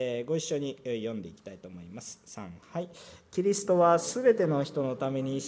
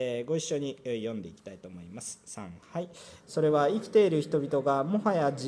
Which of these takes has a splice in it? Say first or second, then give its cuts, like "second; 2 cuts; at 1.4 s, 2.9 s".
second; 1 cut; at 3.2 s